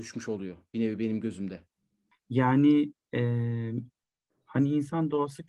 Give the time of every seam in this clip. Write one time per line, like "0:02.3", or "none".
0:02.1

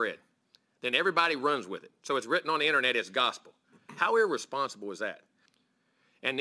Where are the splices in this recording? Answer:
none

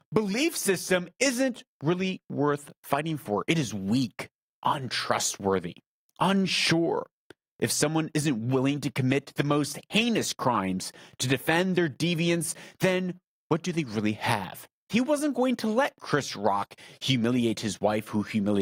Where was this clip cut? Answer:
0:14.9

